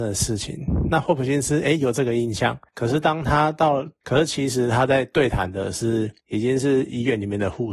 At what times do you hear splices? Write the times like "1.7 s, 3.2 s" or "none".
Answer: 4.0 s